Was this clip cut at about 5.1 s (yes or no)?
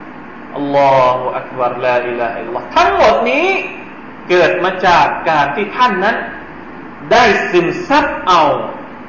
no